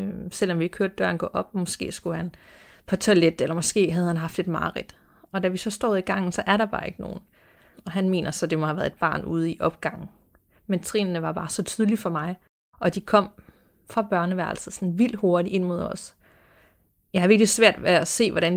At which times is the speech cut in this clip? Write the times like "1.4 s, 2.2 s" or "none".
7.7 s